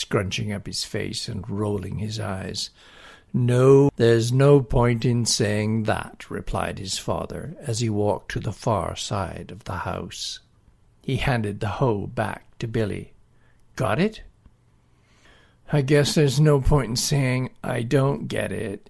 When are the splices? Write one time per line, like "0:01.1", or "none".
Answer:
0:03.9
0:10.9